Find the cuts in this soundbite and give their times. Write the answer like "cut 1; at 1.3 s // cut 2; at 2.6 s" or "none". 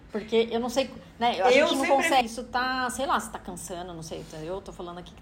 cut 1; at 2.2 s

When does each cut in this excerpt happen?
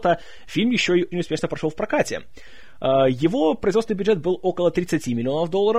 cut 1; at 1.1 s

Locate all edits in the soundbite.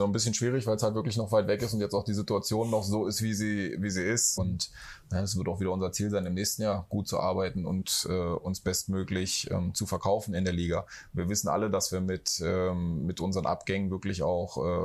cut 1; at 4.4 s

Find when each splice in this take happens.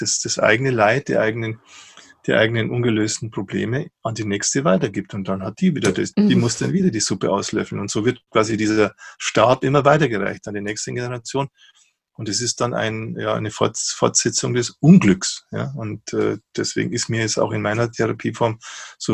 cut 1; at 6.1 s

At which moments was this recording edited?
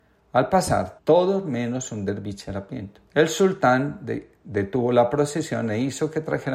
cut 1; at 1.0 s // cut 2; at 3.1 s

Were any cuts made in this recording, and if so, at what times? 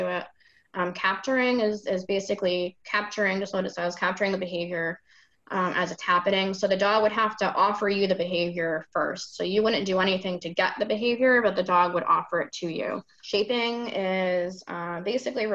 cut 1; at 13.2 s

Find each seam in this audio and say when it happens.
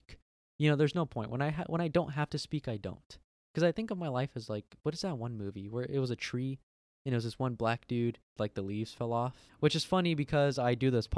cut 1; at 8.4 s // cut 2; at 9.5 s

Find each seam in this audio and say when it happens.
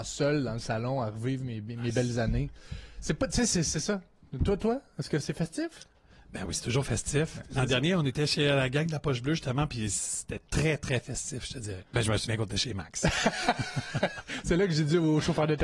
cut 1; at 11.8 s

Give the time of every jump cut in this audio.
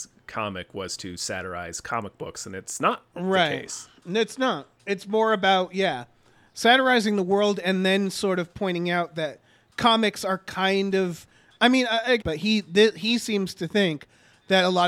cut 1; at 4.8 s // cut 2; at 12.2 s

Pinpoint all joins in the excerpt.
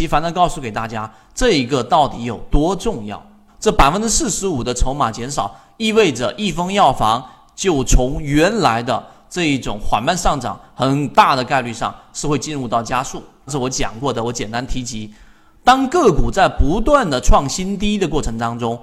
cut 1; at 3.5 s

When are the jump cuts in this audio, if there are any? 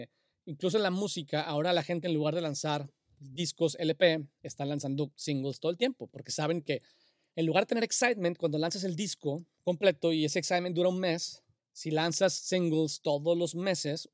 cut 1; at 11.6 s

